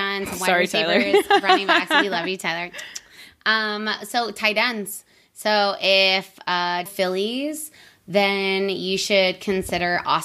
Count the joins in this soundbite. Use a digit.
1